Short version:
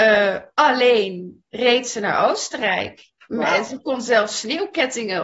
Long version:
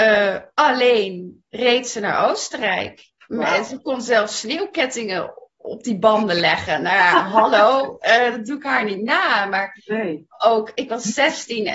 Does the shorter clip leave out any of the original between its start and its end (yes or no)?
no